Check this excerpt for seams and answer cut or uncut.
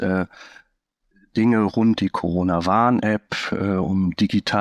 cut